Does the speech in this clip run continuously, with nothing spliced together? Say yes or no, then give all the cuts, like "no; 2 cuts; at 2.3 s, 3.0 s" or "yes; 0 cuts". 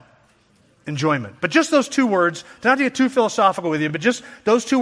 yes; 0 cuts